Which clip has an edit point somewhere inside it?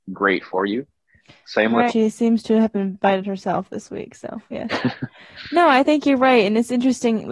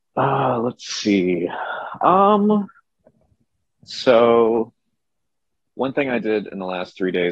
first; 1 cut; at 1.9 s

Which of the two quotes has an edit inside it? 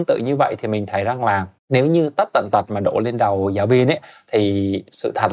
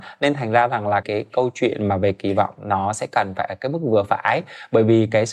second; 1 cut; at 1.0 s

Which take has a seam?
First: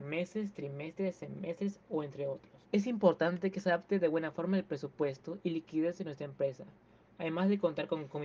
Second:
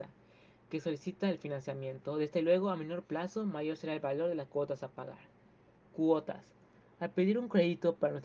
first; 2 cuts; at 2.6 s, 7.2 s

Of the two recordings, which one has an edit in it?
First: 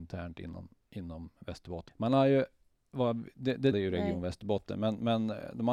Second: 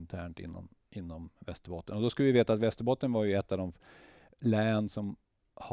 first; 2 cuts; at 1.9 s, 3.7 s

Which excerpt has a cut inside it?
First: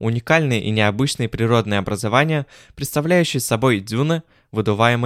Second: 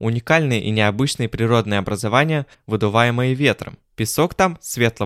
second; 1 cut; at 2.5 s

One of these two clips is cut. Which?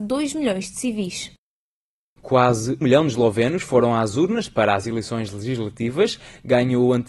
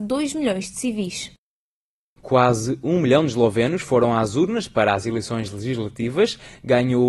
first; 1 cut; at 2.8 s

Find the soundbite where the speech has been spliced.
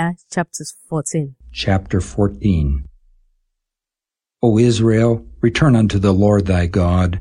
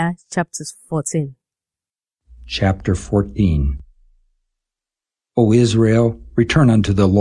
first; 1 cut; at 1.4 s

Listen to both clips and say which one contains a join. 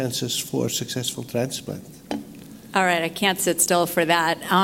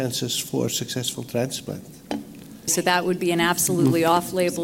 second; 1 cut; at 2.7 s

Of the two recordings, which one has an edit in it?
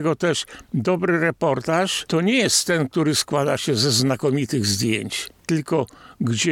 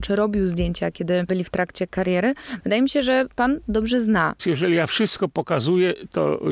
second; 1 cut; at 4.4 s

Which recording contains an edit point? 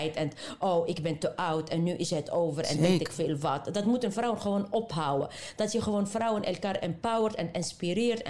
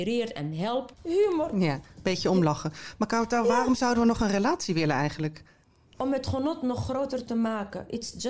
second; 1 cut; at 0.9 s

